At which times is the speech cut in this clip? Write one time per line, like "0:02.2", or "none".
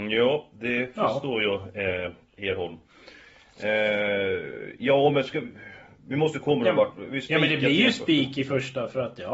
none